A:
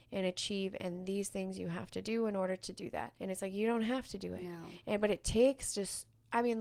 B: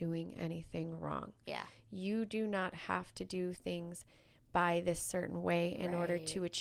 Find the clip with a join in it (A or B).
A